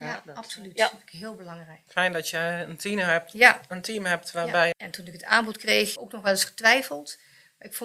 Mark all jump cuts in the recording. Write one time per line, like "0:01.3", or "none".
0:01.9
0:04.7
0:06.0